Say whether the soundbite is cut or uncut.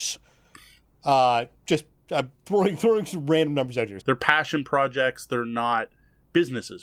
cut